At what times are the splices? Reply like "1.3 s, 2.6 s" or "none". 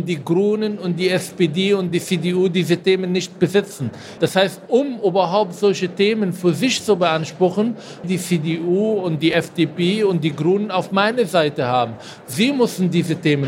4.2 s, 8.0 s